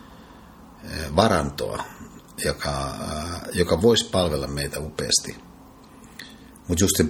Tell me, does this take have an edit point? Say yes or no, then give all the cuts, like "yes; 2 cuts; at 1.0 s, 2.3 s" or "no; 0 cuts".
no; 0 cuts